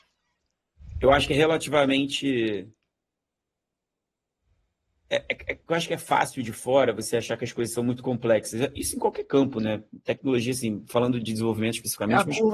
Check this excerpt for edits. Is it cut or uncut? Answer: uncut